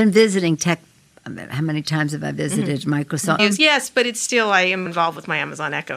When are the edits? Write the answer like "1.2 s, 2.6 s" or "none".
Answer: 3.4 s, 4.9 s